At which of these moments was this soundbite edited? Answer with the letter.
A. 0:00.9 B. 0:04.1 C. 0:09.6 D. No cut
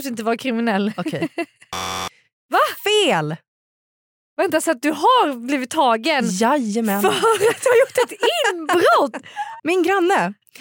C